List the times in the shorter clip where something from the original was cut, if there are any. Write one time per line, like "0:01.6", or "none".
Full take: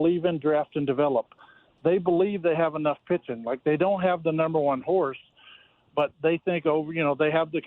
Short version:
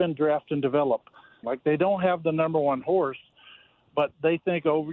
0:01.4